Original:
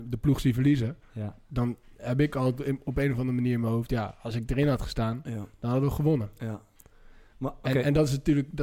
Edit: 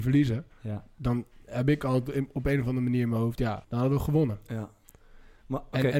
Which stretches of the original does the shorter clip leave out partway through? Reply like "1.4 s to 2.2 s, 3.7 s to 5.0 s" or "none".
4.2 s to 5.6 s